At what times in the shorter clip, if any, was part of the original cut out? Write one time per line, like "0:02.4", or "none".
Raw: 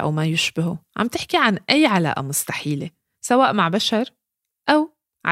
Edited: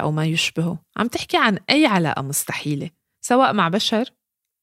none